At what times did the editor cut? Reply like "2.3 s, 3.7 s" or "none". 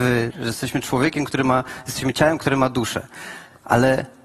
none